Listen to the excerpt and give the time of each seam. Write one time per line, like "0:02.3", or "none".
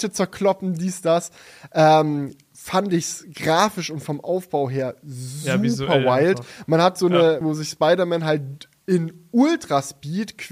0:07.4